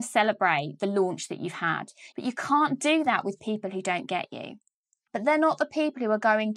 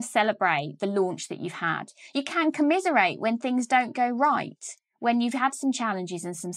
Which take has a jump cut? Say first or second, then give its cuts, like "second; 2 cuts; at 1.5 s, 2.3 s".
first; 2 cuts; at 2.1 s, 5.1 s